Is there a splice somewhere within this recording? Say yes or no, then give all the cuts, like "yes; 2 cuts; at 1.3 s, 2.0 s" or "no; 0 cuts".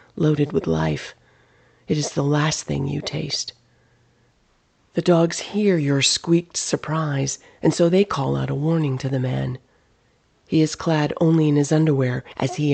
no; 0 cuts